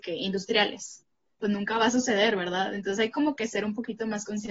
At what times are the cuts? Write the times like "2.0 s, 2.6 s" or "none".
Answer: 1.4 s